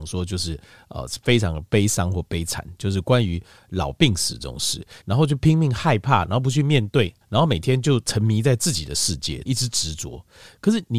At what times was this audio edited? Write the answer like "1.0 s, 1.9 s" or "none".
5.0 s, 7.2 s, 9.5 s